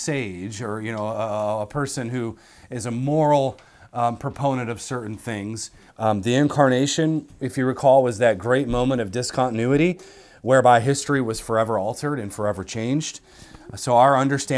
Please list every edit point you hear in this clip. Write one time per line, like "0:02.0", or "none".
0:05.9